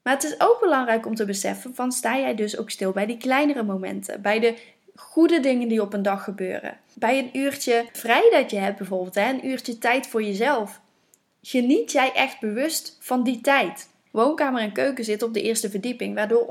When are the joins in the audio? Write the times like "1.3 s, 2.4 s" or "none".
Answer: 14.1 s